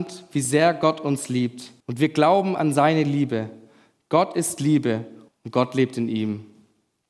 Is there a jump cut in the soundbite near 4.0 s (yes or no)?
no